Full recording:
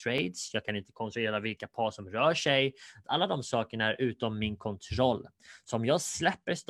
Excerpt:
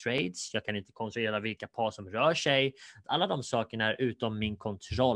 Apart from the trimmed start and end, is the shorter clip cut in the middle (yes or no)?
no